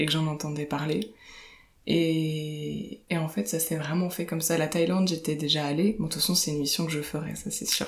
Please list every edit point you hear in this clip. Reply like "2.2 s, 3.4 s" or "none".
3.0 s